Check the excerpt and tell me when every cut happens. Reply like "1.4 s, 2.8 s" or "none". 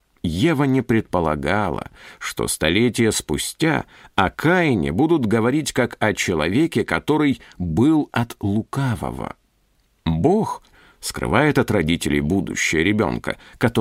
10.7 s